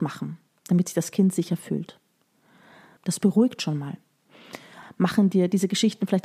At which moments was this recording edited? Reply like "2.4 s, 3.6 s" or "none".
3.0 s, 4.8 s